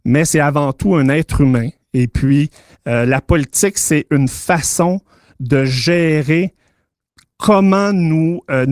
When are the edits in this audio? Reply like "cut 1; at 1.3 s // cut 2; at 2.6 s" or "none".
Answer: none